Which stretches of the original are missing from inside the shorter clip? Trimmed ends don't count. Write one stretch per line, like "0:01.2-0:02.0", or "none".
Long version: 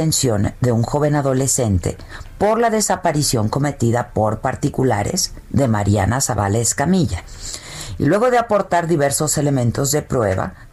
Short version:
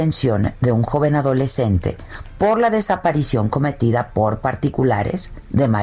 none